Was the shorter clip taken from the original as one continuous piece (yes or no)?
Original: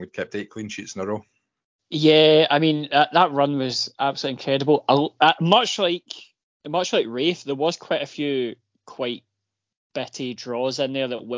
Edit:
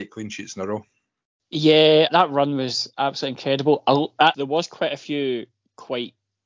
no